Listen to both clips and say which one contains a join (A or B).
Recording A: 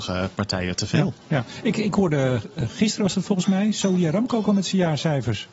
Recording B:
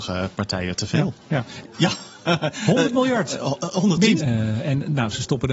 B